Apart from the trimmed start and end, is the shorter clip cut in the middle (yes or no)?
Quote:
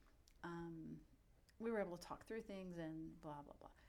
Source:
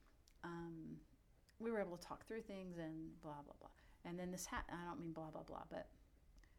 no